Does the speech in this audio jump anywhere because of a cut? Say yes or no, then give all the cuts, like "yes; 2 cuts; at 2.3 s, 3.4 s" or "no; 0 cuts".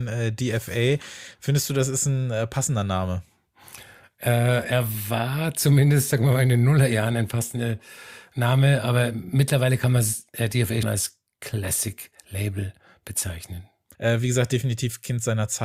yes; 2 cuts; at 10.8 s, 13.9 s